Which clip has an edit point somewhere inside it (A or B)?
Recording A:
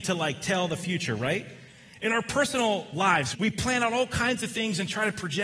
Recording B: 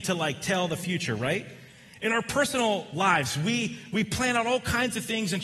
A